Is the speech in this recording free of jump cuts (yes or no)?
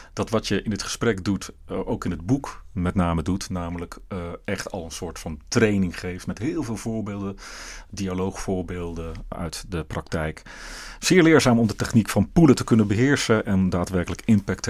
no